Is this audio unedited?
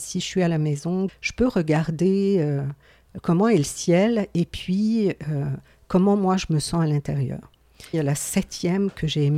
no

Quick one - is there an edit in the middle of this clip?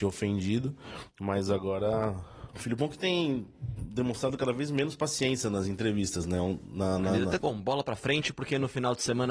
yes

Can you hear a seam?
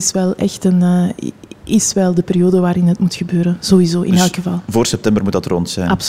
no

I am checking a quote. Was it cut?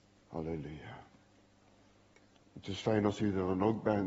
yes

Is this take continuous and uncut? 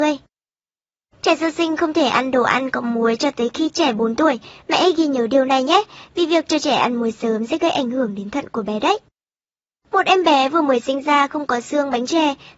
yes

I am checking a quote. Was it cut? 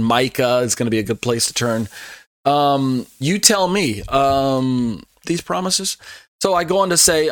yes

